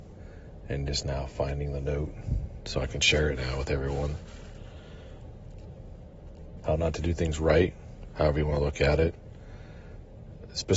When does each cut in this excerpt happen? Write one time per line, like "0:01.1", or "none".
0:06.6